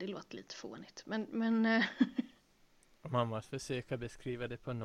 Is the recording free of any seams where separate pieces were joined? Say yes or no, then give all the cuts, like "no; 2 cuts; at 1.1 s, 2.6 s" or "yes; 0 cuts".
yes; 0 cuts